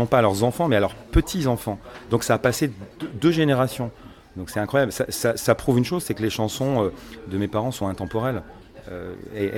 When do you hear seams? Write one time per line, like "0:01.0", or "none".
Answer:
none

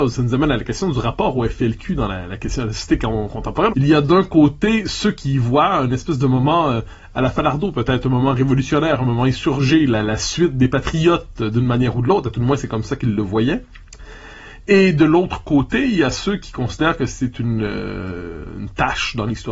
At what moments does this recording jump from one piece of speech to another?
0:03.7

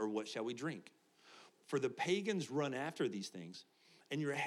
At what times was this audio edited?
0:01.5

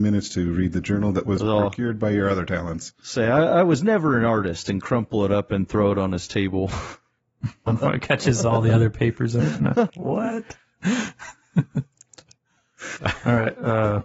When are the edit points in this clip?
0:07.7
0:09.9
0:13.0

